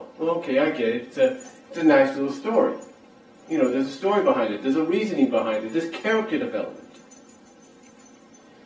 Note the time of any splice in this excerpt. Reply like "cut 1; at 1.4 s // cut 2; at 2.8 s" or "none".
none